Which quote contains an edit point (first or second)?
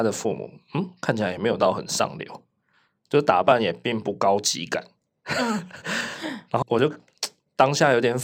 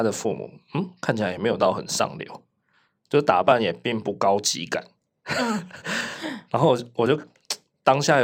first